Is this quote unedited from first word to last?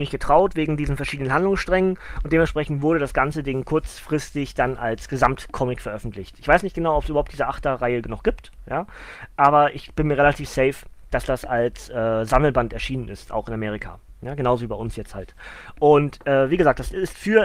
yes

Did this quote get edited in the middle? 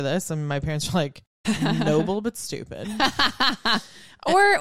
yes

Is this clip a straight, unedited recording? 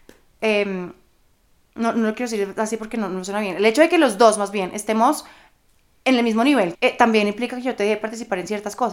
no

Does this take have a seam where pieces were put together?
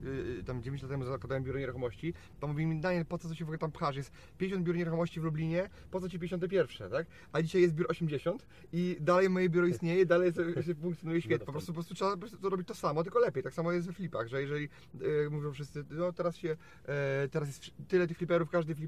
yes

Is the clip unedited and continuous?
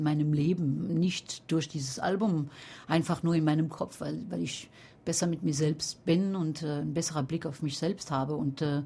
yes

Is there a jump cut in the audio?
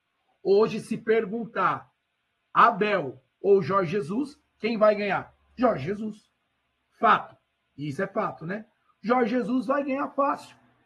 no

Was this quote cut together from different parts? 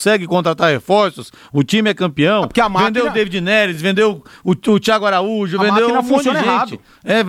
no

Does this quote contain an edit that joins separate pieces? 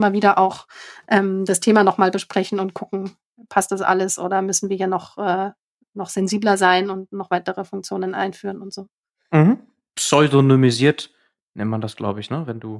no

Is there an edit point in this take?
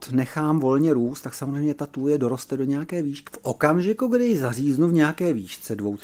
yes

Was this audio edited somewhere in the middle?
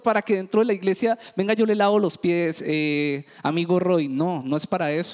no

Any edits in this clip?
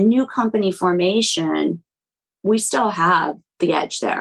no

